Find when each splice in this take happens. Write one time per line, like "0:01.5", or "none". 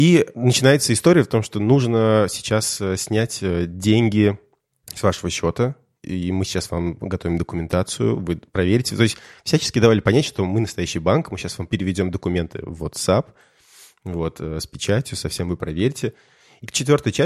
none

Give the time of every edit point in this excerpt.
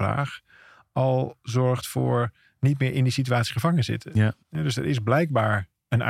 0:04.4

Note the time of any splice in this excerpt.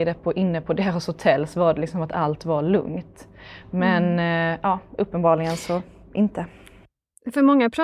none

